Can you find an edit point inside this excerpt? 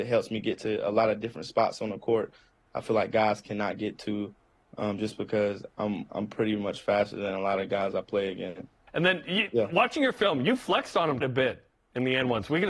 yes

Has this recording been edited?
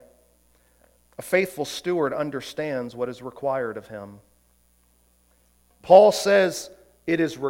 no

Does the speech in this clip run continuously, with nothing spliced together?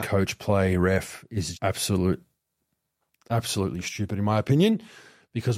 no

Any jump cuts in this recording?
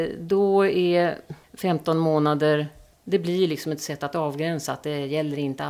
yes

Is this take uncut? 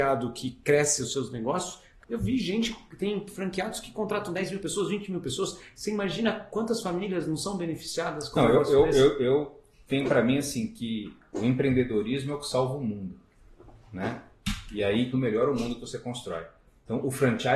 no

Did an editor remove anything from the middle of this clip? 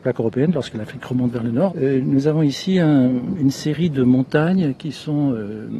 yes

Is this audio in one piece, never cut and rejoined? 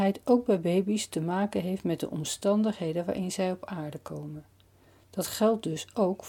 yes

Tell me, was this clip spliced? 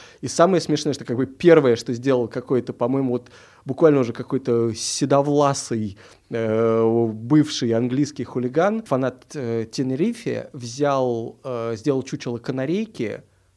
no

